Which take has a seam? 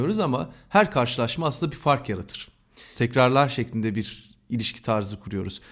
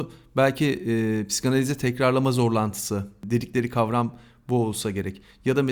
first; 1 cut; at 2.9 s

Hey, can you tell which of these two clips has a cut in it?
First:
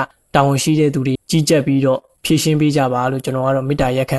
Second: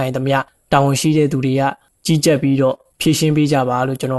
first; 1 cut; at 1.2 s

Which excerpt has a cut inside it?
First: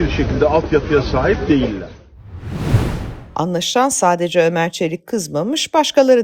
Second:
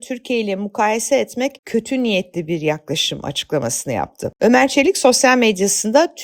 first; 1 cut; at 3.3 s

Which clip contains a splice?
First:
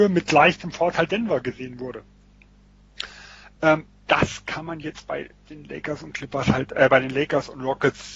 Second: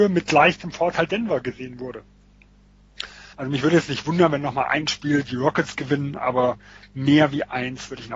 second; 1 cut; at 3.3 s

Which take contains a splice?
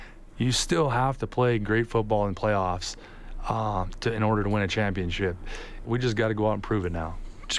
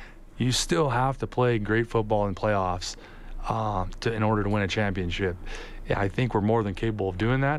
first; 1 cut; at 5.8 s

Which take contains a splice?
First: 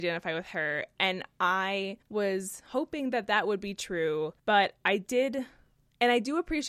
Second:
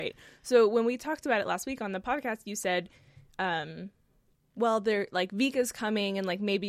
first; 2 cuts; at 2.0 s, 4.4 s

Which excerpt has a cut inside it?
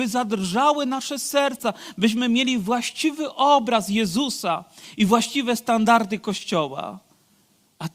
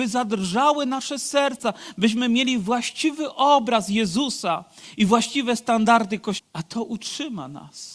second; 1 cut; at 6.4 s

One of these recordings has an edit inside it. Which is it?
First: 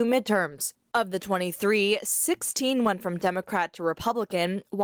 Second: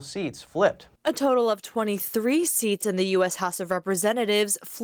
second; 1 cut; at 1.0 s

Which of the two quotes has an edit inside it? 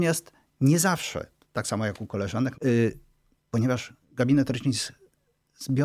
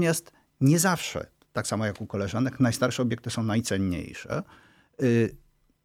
first; 2 cuts; at 2.5 s, 4.0 s

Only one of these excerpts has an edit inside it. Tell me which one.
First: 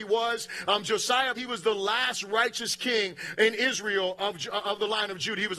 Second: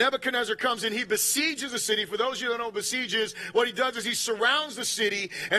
first; 1 cut; at 1.4 s

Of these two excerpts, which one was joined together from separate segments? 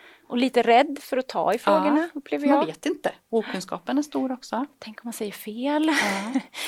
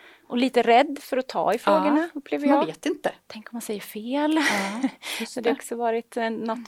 second; 1 cut; at 3.3 s

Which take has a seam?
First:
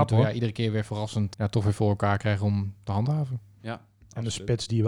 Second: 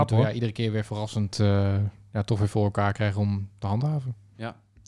first; 1 cut; at 1.3 s

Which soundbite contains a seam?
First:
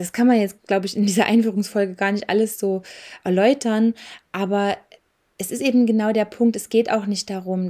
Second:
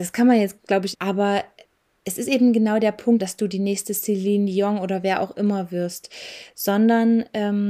second; 2 cuts; at 0.9 s, 3.2 s

